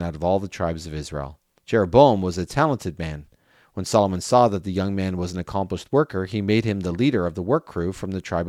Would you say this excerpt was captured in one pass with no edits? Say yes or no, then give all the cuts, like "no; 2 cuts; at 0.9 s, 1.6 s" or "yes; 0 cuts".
no; 1 cut; at 1.6 s